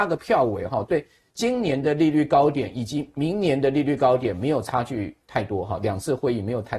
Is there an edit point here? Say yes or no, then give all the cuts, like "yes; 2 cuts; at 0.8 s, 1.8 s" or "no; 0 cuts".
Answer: no; 0 cuts